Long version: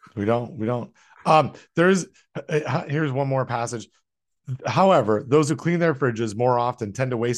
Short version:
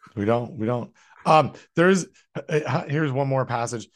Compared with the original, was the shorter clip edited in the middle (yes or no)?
no